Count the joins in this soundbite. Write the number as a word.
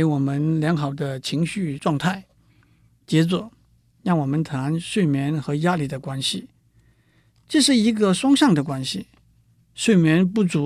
zero